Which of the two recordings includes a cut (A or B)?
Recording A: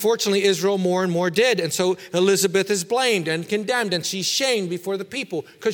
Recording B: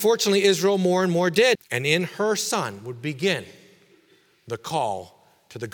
B